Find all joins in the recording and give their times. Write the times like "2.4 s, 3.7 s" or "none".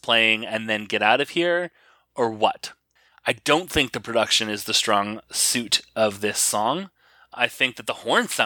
none